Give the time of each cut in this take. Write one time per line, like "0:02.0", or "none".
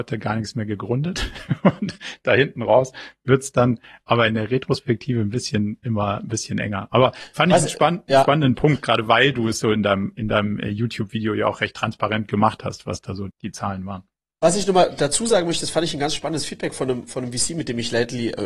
0:13.3